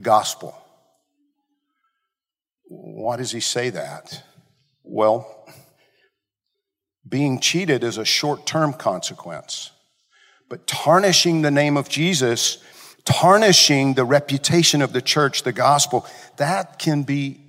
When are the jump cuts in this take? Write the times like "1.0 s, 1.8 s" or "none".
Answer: none